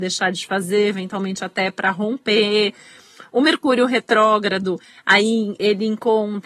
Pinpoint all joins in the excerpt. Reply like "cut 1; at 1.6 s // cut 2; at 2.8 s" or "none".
none